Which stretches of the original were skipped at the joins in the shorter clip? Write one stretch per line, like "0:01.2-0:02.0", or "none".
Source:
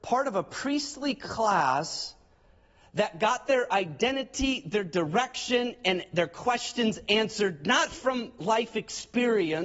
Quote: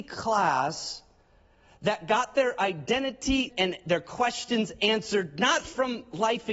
0:04.6-0:05.8